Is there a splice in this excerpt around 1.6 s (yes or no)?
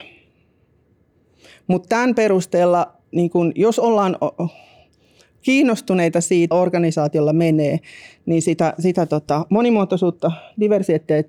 no